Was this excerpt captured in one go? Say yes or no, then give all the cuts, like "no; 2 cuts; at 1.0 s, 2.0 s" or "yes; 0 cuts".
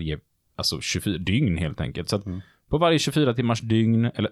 yes; 0 cuts